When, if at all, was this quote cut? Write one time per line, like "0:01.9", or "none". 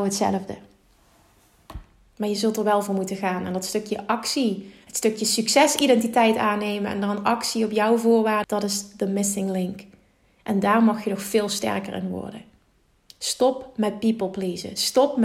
0:08.4